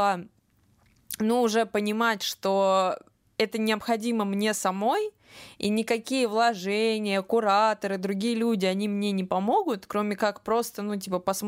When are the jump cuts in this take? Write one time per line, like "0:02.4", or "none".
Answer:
none